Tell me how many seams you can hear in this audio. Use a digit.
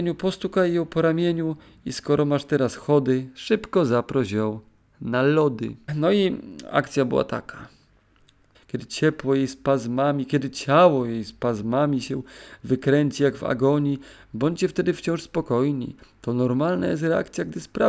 2